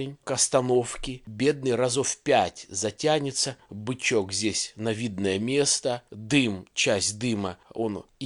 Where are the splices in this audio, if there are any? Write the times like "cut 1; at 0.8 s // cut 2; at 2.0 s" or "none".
none